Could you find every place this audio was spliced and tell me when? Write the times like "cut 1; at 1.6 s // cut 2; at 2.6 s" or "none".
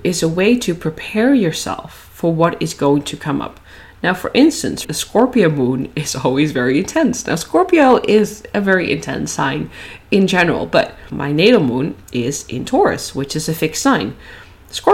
cut 1; at 4.8 s